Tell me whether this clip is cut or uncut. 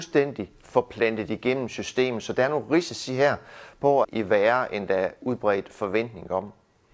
cut